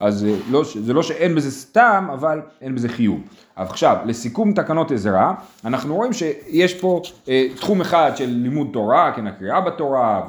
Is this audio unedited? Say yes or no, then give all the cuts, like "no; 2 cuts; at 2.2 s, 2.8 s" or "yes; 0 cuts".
no; 1 cut; at 2.6 s